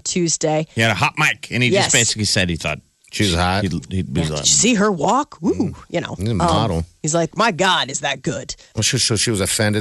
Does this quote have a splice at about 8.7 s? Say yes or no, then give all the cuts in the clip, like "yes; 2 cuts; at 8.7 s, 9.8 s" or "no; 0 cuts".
yes; 2 cuts; at 7.3 s, 8.7 s